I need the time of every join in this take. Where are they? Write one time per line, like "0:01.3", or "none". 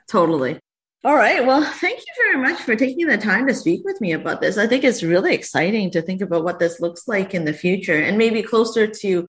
none